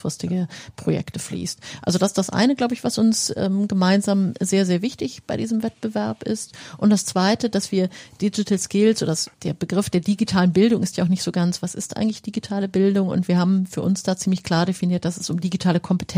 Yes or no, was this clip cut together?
yes